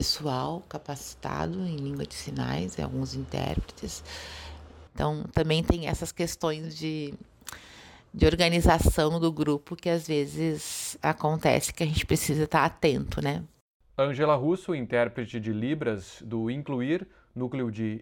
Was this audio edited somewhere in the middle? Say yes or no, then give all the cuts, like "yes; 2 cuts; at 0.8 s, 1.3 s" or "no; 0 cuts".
yes; 1 cut; at 4.9 s